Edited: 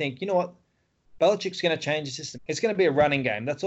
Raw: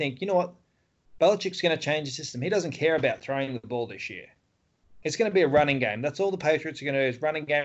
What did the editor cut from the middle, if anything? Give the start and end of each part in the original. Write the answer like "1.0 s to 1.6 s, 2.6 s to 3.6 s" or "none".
2.3 s to 4.9 s